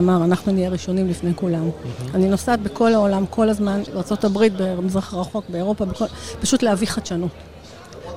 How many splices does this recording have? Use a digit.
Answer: 1